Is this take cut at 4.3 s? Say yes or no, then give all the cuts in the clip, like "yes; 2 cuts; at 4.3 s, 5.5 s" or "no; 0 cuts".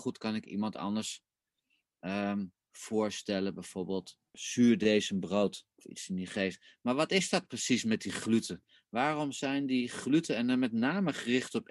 yes; 3 cuts; at 2.7 s, 4.3 s, 5.8 s